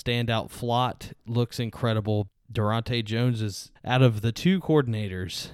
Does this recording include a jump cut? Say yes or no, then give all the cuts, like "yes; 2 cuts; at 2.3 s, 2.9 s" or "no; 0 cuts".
yes; 2 cuts; at 2.4 s, 3.8 s